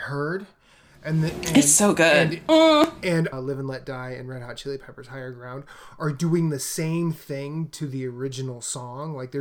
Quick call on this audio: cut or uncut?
cut